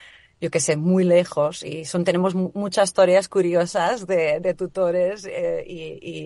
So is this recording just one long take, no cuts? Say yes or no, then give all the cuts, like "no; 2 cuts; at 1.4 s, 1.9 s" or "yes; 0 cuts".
yes; 0 cuts